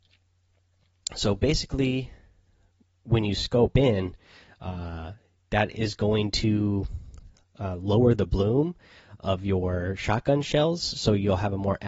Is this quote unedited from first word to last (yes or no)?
yes